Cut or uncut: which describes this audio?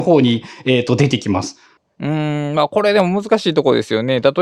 uncut